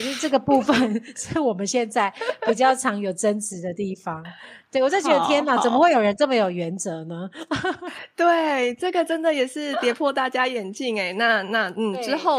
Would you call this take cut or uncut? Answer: uncut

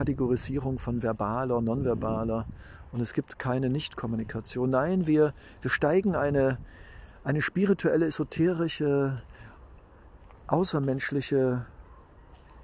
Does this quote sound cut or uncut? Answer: uncut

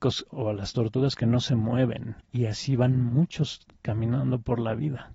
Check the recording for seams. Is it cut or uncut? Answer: cut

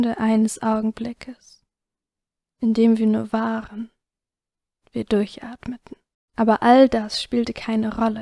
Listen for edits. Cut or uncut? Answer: cut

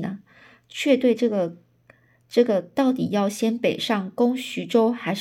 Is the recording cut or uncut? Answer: uncut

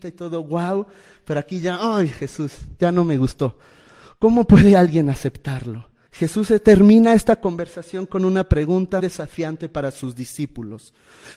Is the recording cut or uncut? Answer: cut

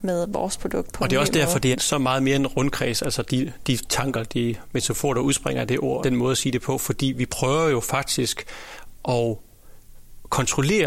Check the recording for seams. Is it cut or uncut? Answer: cut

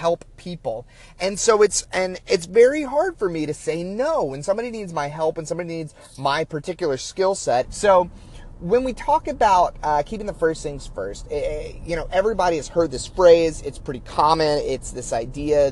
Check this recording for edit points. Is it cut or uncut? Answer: cut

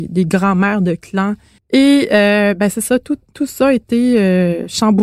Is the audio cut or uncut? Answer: cut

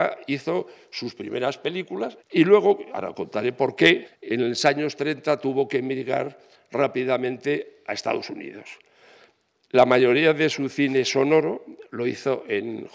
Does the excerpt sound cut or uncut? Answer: cut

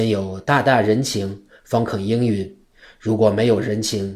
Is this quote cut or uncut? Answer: uncut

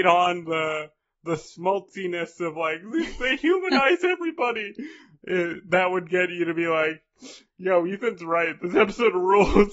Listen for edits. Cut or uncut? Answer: uncut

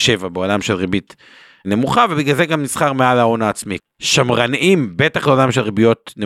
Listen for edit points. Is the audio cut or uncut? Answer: cut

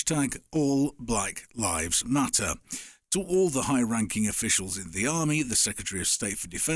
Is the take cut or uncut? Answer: uncut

